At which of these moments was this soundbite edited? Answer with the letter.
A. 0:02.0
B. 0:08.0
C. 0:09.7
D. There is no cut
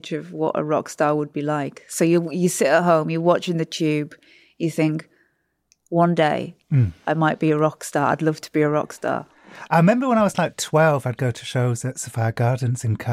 C